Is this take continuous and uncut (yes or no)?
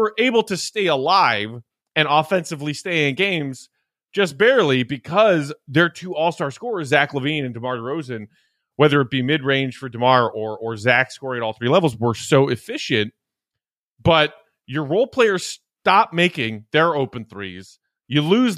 yes